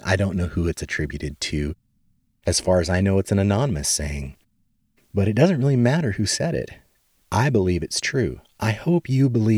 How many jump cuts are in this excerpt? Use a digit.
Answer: 0